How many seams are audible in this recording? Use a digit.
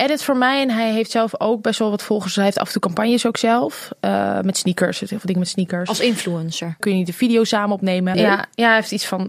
2